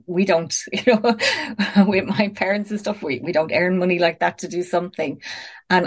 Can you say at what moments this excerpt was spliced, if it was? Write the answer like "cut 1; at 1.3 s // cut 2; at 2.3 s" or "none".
none